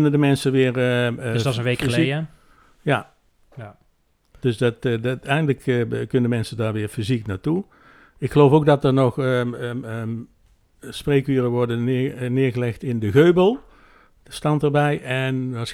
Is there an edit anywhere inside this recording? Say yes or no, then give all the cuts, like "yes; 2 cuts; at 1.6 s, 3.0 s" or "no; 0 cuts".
no; 0 cuts